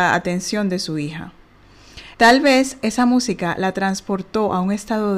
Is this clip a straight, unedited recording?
no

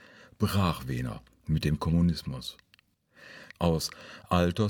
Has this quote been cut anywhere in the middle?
yes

